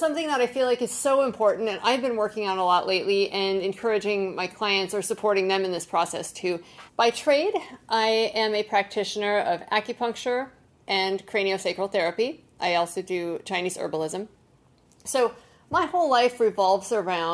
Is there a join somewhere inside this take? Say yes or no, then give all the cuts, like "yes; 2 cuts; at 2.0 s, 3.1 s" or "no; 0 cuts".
yes; 2 cuts; at 6.9 s, 10.8 s